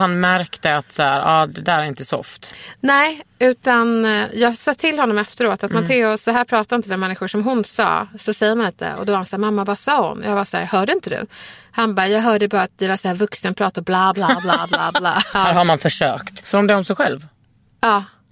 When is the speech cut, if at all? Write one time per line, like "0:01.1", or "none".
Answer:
0:15.3
0:16.4